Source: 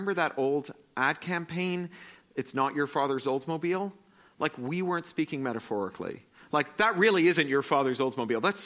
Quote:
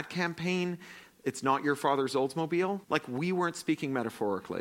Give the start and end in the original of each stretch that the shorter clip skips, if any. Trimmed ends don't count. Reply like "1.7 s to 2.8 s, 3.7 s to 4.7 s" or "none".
4.0 s to 4.3 s